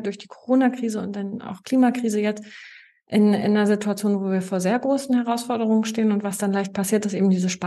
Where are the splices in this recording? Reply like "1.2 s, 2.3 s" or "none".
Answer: none